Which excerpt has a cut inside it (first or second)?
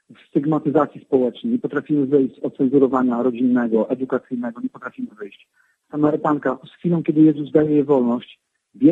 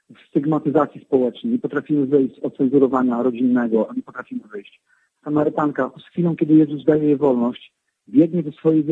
second